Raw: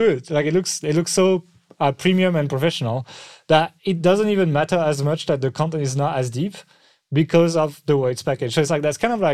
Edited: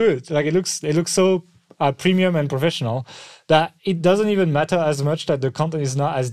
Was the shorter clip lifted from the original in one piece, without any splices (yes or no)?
yes